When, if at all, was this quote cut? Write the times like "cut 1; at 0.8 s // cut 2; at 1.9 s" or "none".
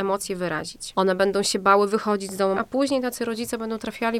cut 1; at 0.9 s // cut 2; at 2.5 s